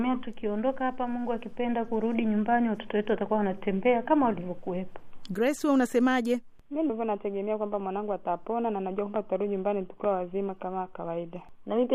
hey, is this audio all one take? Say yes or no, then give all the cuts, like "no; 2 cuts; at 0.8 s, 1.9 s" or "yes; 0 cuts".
no; 2 cuts; at 5.3 s, 6.9 s